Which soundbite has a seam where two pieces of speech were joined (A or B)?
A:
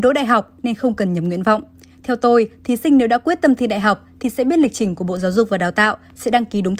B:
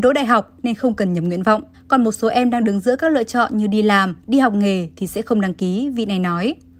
B